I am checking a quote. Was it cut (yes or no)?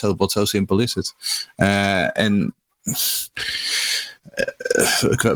no